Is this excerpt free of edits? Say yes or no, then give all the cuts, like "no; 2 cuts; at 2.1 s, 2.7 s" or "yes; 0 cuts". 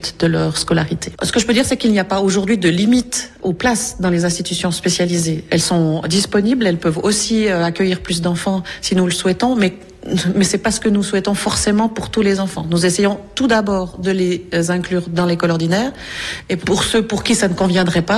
yes; 0 cuts